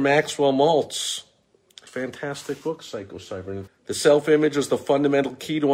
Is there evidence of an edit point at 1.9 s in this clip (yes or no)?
yes